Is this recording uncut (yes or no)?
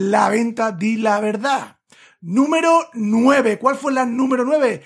yes